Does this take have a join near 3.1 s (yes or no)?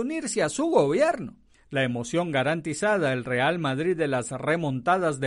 no